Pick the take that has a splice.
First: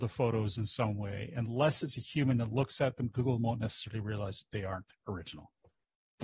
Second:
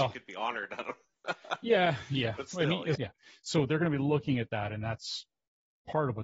second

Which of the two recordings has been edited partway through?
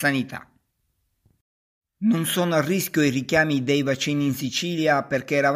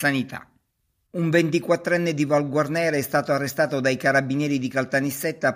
second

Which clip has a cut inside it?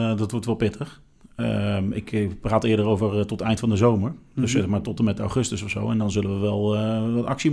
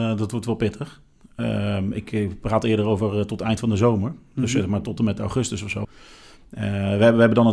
second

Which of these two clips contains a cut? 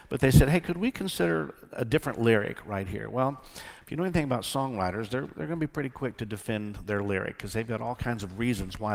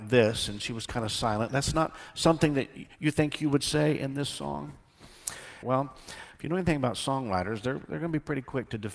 second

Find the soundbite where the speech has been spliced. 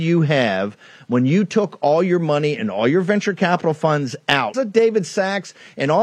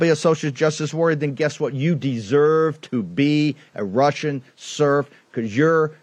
first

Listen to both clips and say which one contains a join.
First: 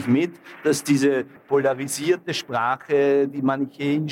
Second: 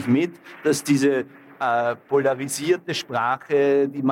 first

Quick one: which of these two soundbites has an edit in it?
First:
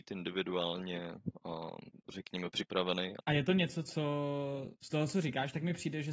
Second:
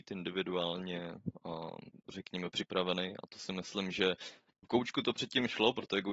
first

